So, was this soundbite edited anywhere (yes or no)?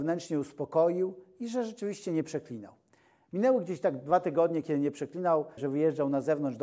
yes